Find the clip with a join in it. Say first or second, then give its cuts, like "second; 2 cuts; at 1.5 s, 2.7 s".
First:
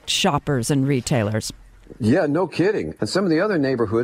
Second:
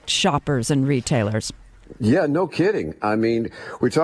first; 1 cut; at 3.0 s